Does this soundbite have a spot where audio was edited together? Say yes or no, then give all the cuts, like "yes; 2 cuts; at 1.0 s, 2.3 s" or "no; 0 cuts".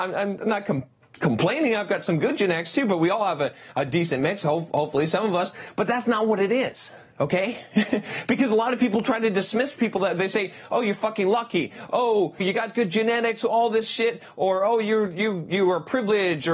yes; 1 cut; at 12.4 s